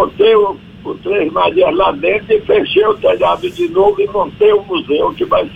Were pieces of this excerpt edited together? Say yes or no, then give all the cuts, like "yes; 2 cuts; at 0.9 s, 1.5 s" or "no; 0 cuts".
no; 0 cuts